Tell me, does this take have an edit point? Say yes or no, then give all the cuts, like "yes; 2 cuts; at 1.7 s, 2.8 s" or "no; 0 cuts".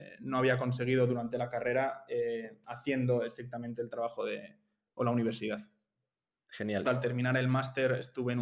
yes; 1 cut; at 6.9 s